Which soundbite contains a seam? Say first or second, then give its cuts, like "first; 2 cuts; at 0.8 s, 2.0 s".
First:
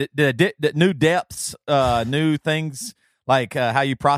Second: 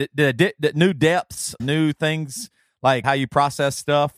second; 2 cuts; at 1.6 s, 3.0 s